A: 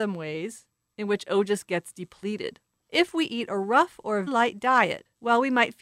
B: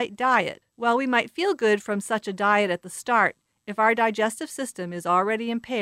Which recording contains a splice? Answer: A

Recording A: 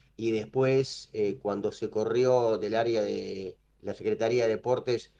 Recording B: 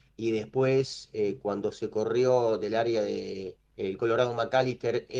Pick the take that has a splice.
B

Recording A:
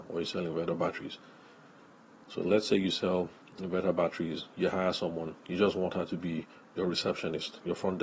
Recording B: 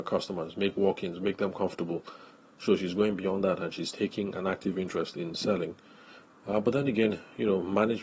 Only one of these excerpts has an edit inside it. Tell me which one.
B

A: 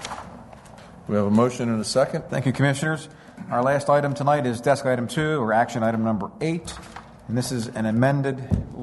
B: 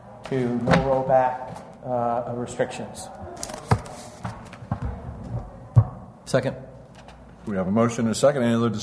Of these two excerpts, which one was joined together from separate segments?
A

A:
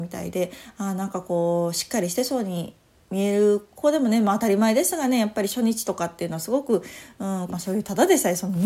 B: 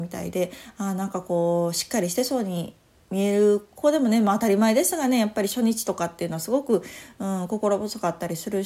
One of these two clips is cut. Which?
A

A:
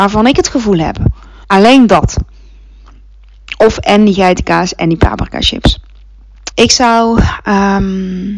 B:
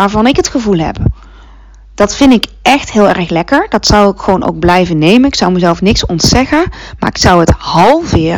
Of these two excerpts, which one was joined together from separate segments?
A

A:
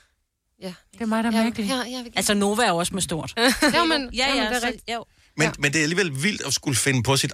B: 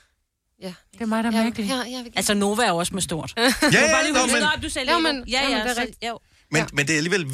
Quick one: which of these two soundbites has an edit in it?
A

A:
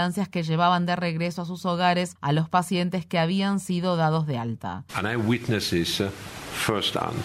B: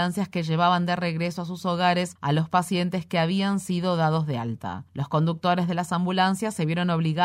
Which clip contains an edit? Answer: A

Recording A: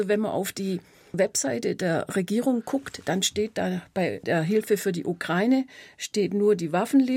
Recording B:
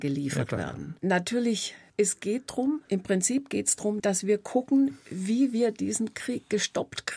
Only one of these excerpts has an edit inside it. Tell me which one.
B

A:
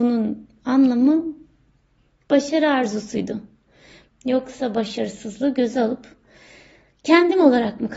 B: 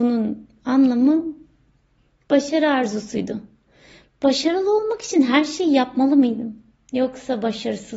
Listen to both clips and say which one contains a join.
A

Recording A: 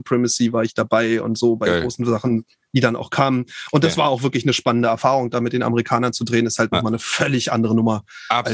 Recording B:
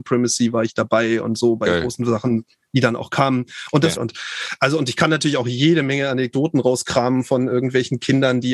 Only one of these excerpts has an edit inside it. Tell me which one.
B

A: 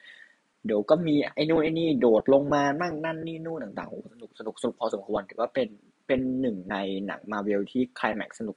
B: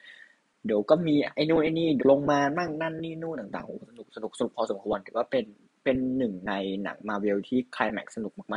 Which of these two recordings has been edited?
B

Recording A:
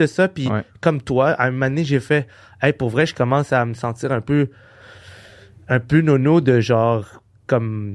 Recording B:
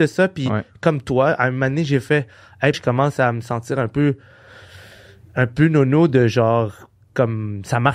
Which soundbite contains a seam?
B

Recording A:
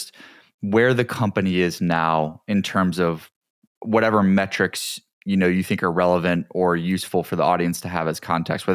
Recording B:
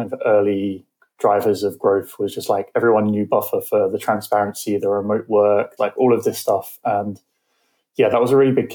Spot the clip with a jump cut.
B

